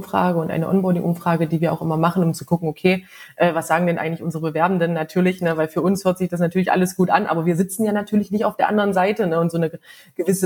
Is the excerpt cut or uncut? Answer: uncut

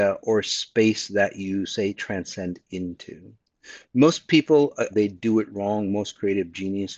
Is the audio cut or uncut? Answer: cut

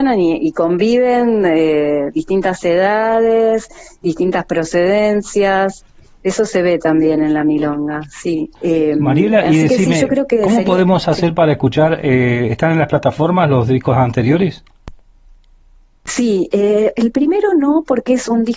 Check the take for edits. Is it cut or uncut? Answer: cut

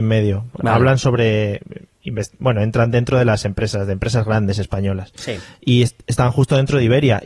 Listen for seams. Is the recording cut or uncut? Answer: uncut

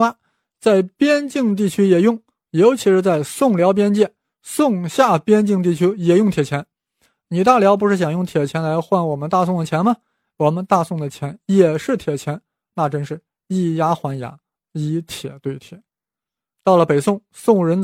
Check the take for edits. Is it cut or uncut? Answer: cut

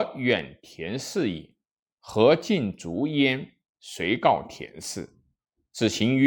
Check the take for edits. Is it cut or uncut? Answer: cut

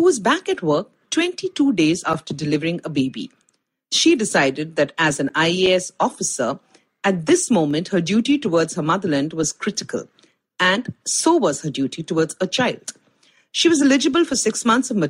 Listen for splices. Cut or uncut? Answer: uncut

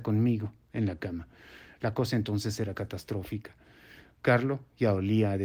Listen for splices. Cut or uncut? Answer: uncut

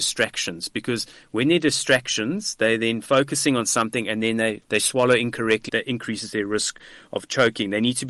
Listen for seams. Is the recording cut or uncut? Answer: cut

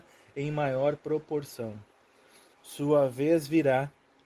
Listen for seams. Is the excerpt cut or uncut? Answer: cut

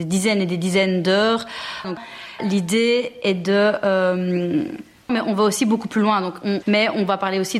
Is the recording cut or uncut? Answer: cut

